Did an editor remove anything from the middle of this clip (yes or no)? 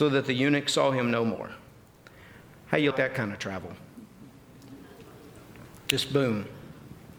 yes